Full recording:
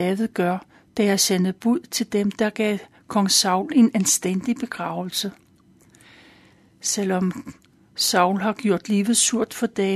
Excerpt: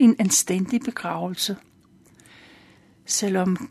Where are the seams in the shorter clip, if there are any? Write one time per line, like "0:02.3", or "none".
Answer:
none